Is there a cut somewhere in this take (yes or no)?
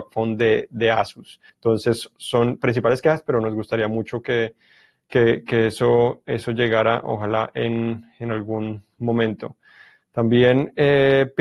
yes